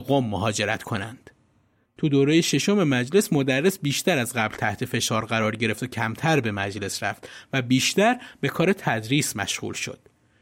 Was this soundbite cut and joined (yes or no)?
yes